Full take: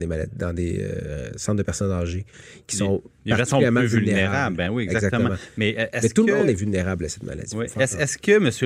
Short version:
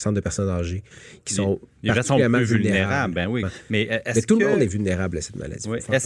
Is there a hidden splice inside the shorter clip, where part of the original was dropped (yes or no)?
yes